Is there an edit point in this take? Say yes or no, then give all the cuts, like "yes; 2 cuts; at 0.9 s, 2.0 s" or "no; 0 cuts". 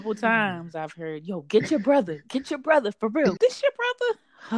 yes; 1 cut; at 3.4 s